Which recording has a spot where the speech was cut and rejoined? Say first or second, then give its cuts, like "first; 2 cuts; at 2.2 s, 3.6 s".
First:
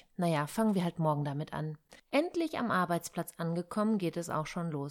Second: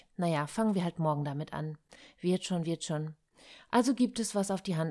first; 1 cut; at 2.0 s